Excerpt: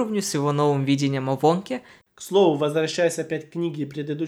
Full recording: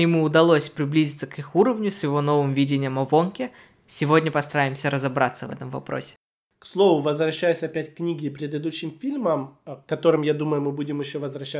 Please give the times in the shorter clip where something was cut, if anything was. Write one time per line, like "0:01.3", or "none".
0:02.0